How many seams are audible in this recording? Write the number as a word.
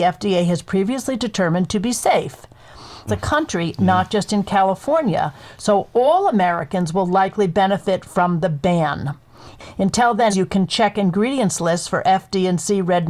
two